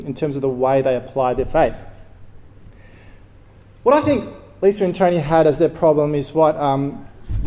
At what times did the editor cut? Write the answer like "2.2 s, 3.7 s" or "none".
none